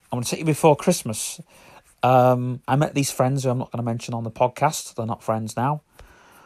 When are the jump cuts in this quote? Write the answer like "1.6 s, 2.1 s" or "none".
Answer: 2.6 s